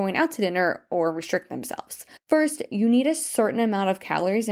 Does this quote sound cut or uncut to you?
cut